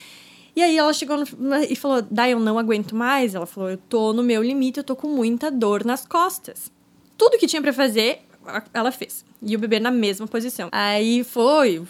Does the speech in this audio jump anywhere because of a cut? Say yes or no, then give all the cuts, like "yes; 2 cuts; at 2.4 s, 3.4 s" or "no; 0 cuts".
yes; 2 cuts; at 7.0 s, 10.7 s